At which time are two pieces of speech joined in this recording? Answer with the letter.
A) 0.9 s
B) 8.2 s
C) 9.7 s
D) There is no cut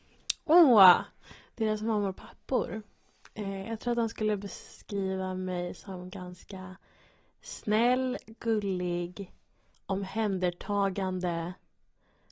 C